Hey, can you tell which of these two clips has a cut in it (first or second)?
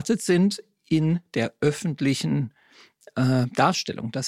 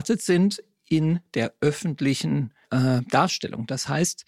second